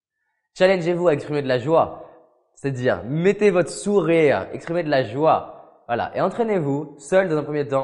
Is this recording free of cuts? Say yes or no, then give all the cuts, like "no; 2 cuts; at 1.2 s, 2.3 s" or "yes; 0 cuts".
yes; 0 cuts